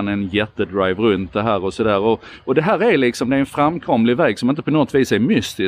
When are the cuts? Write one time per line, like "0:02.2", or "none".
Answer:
none